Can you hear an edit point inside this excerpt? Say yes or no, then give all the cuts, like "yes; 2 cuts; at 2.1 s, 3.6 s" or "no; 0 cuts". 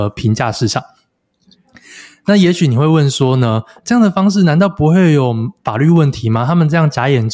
no; 0 cuts